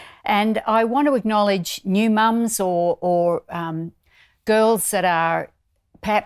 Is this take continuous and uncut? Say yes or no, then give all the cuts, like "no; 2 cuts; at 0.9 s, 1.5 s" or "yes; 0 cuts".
yes; 0 cuts